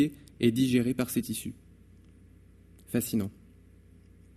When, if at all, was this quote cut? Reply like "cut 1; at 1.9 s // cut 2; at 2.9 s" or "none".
none